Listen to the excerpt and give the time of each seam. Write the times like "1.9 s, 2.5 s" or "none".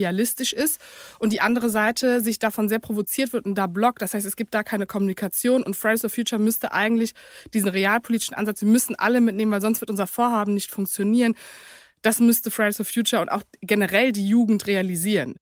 none